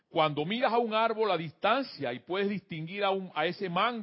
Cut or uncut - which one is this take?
uncut